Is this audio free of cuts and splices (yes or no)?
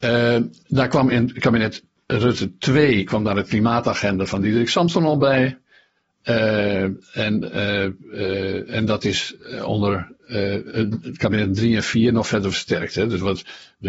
yes